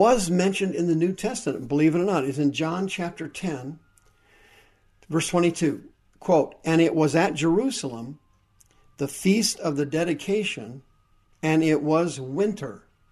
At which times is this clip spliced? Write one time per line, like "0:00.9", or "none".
none